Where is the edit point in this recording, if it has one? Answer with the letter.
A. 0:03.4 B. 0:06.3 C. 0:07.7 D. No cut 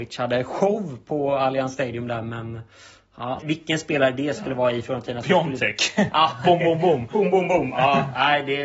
A